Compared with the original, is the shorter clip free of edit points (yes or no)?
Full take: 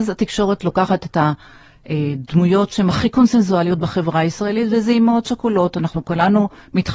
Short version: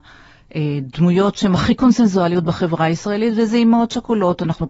yes